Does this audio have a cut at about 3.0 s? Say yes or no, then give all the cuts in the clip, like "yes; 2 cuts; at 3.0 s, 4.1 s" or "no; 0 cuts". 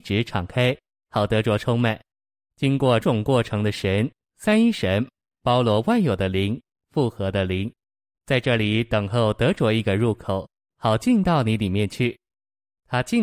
yes; 1 cut; at 3.0 s